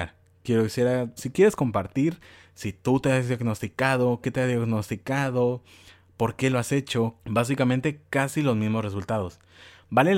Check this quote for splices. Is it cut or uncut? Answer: cut